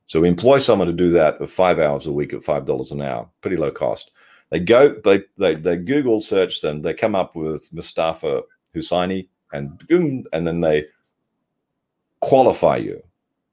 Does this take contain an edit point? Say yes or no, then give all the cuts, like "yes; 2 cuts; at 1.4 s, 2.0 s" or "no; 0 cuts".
no; 0 cuts